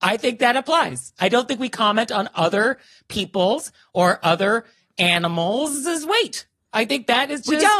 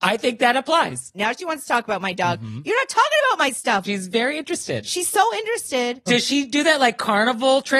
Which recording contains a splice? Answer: second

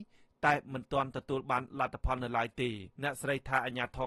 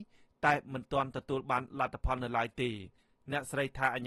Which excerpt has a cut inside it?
first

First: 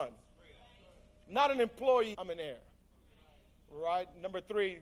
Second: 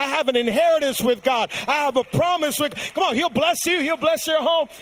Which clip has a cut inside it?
first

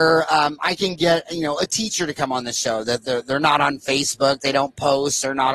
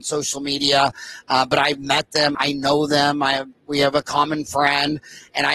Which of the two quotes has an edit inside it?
second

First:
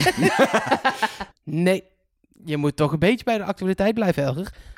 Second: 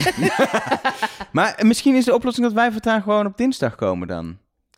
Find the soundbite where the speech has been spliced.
first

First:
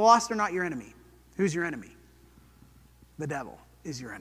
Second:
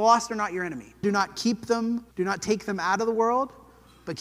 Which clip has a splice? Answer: second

